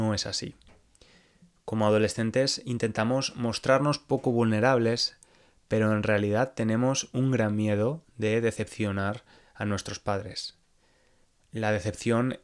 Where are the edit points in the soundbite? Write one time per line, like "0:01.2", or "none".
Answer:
none